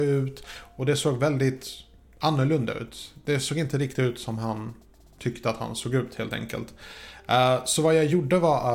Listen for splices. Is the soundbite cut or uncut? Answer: uncut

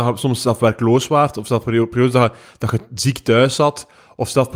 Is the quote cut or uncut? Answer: uncut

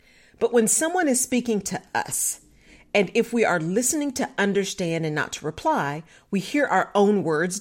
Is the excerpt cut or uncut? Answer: uncut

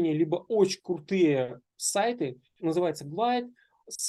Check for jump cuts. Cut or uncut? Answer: cut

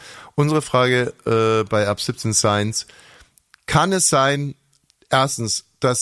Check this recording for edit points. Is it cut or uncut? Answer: uncut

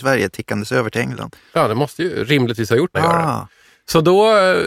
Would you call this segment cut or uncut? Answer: cut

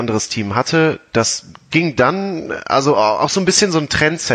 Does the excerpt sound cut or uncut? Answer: uncut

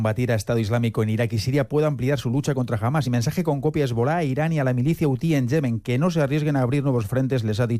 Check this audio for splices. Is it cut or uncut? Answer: uncut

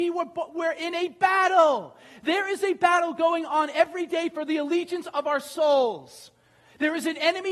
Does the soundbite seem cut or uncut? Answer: uncut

